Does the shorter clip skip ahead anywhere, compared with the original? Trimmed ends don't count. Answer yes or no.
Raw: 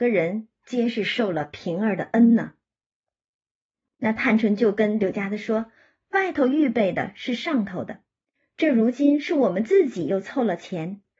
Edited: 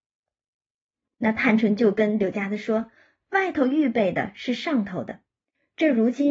no